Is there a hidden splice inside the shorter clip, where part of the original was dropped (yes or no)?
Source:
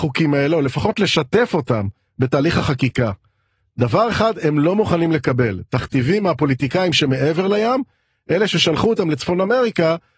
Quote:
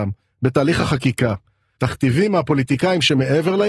yes